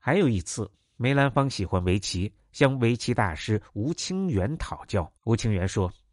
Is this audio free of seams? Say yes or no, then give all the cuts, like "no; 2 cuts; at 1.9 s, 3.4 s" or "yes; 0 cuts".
no; 1 cut; at 5.2 s